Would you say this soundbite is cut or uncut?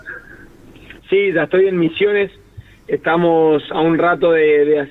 cut